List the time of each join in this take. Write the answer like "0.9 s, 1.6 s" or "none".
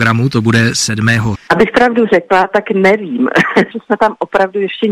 1.3 s, 3.7 s